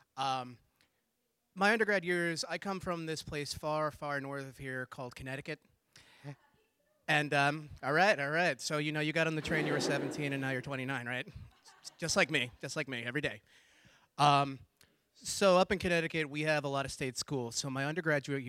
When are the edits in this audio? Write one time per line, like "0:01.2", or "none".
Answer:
none